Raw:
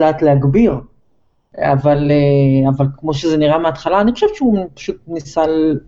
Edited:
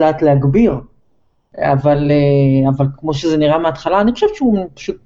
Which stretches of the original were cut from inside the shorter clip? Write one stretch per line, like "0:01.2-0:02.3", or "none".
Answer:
none